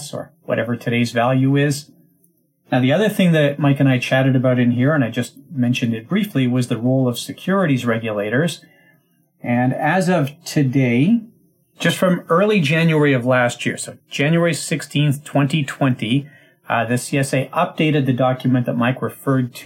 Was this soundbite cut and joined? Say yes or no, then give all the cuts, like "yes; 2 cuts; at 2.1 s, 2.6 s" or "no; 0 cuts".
no; 0 cuts